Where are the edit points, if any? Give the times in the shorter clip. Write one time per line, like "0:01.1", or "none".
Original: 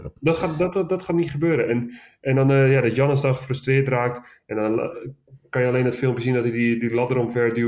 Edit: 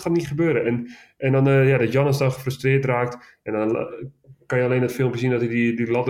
none